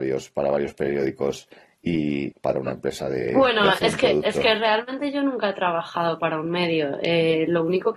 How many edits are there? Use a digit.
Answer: 1